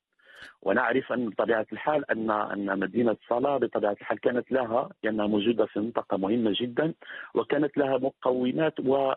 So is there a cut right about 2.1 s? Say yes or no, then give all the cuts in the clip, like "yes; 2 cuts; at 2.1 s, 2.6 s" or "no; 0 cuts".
no; 0 cuts